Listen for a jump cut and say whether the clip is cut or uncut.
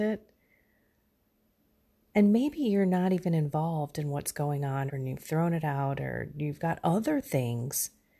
cut